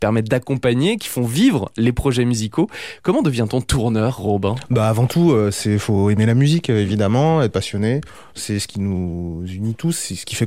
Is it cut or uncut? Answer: uncut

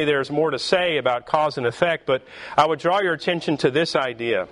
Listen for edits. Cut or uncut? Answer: uncut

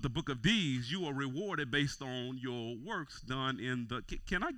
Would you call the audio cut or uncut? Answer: uncut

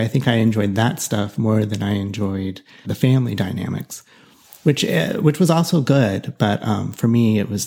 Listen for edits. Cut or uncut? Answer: cut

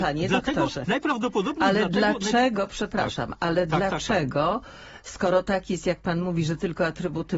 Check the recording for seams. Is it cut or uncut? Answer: uncut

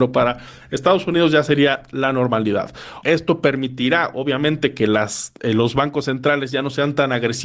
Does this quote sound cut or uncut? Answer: cut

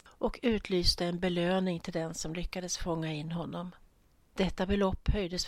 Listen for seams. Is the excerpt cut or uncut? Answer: uncut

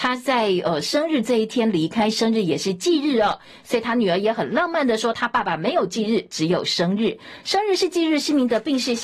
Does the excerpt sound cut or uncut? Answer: uncut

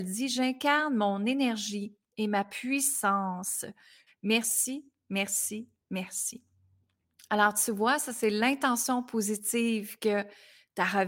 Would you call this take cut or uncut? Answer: cut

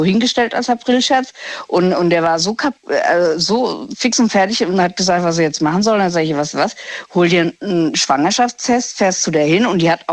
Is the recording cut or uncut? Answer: uncut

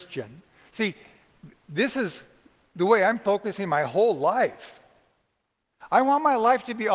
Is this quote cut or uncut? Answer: uncut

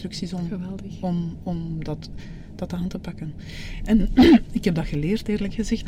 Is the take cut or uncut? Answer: uncut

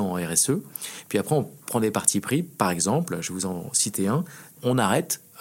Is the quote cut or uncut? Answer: uncut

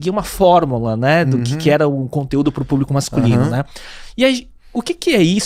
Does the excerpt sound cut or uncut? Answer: uncut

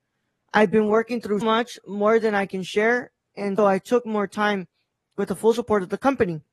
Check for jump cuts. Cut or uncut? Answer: cut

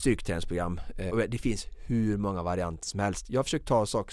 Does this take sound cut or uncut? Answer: cut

